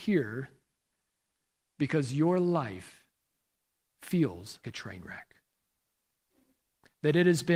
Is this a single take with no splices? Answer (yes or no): no